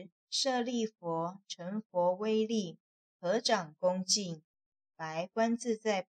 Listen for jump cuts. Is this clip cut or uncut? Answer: uncut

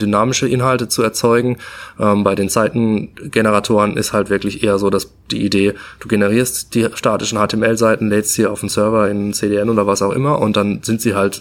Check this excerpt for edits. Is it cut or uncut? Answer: uncut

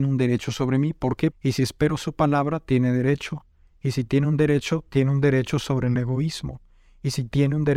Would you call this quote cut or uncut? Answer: cut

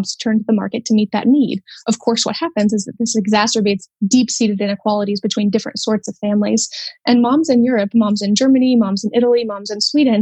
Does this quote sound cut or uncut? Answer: uncut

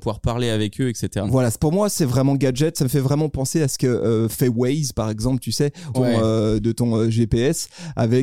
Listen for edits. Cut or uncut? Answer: cut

